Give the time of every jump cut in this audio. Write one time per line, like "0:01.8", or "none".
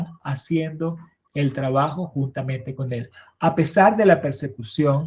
none